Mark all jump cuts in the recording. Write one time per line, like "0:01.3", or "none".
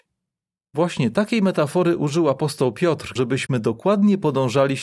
0:03.2